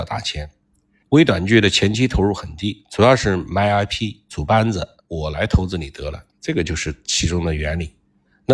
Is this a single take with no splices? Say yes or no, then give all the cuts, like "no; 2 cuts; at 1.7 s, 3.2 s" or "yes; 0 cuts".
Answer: no; 2 cuts; at 5.0 s, 6.3 s